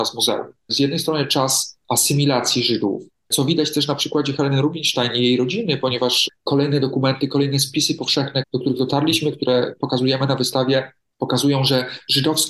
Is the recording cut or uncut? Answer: uncut